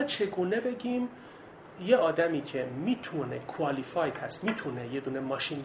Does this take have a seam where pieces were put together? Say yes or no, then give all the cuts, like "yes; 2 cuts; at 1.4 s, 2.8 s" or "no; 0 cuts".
no; 0 cuts